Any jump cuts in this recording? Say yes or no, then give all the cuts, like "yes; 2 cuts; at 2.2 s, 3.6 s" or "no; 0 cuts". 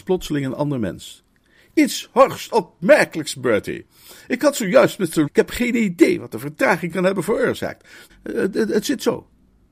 yes; 2 cuts; at 5.3 s, 8.1 s